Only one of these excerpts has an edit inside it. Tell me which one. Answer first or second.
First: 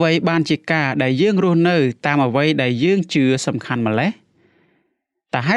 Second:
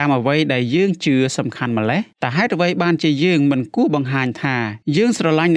second